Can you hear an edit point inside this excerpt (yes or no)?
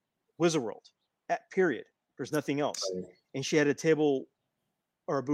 no